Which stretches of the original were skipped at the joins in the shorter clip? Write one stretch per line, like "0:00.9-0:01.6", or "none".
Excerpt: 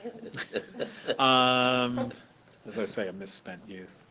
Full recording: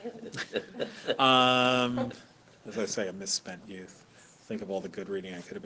none